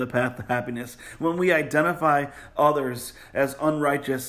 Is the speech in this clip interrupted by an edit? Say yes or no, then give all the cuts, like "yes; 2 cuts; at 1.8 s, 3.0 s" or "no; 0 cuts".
no; 0 cuts